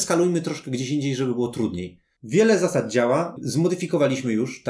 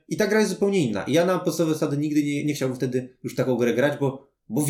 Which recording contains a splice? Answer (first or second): first